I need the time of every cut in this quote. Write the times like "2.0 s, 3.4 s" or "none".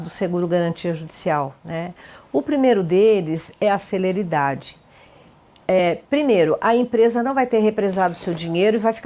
none